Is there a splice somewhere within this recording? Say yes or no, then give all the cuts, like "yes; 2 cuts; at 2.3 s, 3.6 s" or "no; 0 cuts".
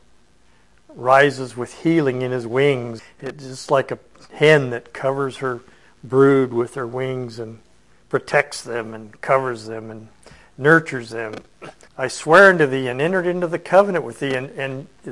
yes; 2 cuts; at 3.0 s, 11.9 s